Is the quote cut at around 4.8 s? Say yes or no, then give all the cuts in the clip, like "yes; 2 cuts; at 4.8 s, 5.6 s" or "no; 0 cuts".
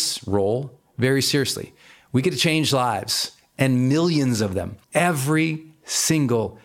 yes; 1 cut; at 4.8 s